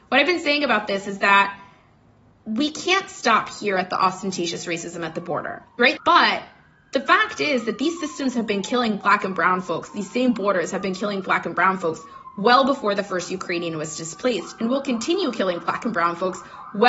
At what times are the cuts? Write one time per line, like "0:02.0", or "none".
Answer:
0:06.0